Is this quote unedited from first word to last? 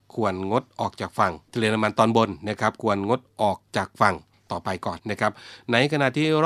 no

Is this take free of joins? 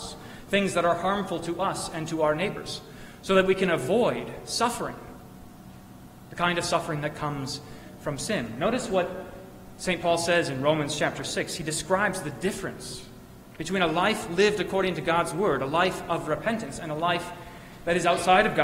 yes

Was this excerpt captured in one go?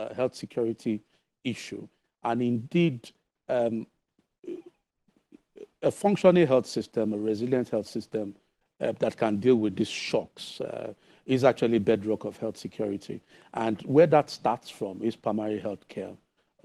yes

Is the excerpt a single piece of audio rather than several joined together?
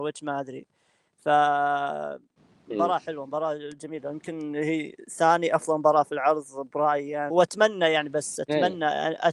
no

